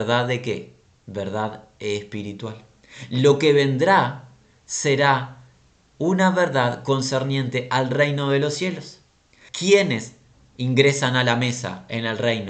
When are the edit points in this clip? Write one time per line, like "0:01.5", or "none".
0:09.5